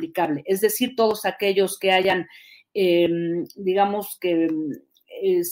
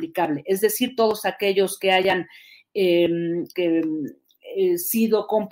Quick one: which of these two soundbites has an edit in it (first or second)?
second